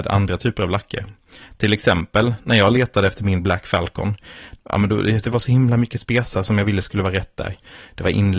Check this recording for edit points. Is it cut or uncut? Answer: cut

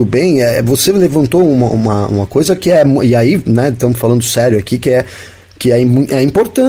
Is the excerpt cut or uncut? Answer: uncut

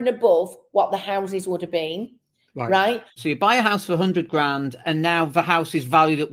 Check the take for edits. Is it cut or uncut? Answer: cut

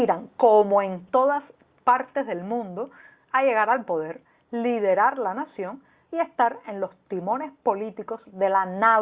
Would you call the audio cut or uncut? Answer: uncut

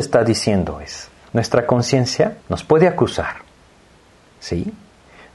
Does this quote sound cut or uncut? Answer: cut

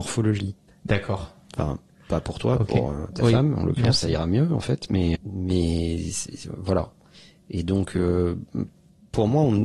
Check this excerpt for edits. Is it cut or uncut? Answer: cut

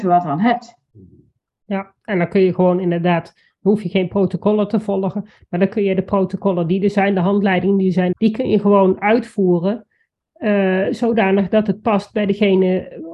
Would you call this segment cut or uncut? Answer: cut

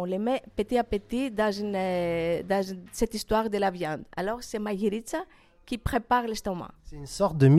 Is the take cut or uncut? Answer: uncut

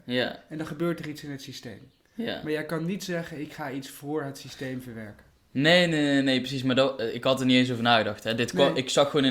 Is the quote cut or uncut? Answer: uncut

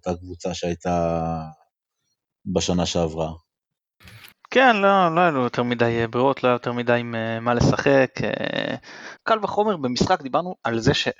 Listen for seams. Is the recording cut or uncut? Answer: cut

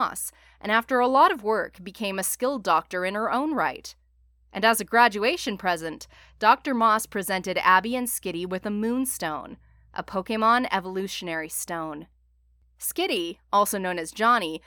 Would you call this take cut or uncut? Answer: uncut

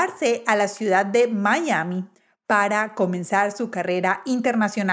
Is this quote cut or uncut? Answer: uncut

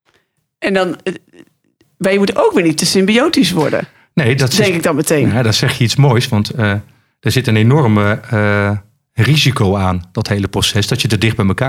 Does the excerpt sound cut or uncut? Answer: uncut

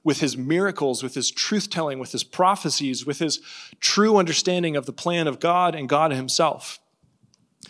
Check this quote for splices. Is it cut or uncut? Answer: uncut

